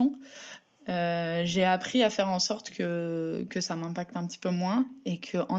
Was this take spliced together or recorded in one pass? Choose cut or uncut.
uncut